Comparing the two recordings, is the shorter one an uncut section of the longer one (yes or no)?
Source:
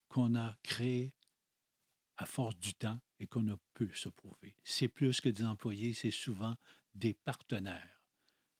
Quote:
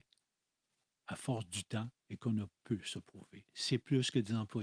yes